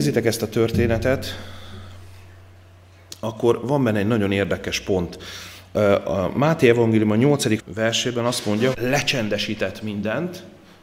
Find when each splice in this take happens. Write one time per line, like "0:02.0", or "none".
0:07.6
0:08.7